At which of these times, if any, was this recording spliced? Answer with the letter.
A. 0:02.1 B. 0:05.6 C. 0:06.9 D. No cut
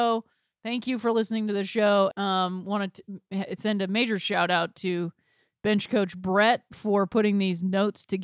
A